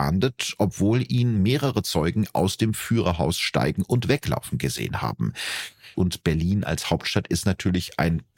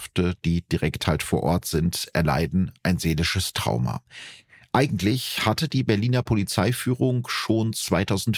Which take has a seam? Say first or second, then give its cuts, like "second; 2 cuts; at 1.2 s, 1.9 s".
first; 1 cut; at 5.9 s